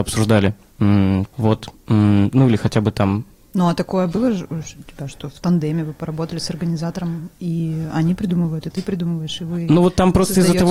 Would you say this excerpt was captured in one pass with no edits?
no; 1 cut; at 1.3 s

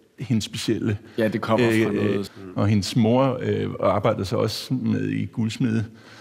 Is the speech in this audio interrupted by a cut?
yes; 1 cut; at 2.3 s

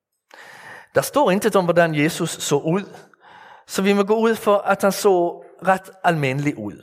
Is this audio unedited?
yes; 0 cuts

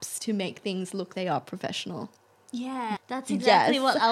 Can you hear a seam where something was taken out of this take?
yes; 2 cuts; at 1.1 s, 3.0 s

